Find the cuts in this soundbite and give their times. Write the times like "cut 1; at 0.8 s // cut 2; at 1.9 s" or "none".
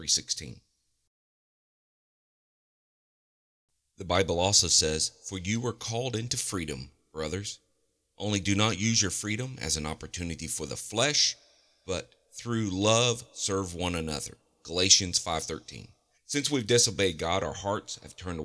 cut 1; at 16.1 s